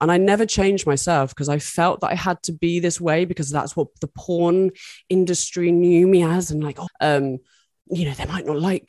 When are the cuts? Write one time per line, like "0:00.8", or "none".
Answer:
0:06.9